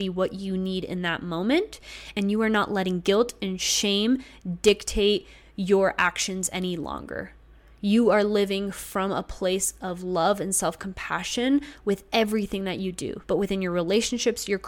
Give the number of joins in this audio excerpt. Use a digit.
1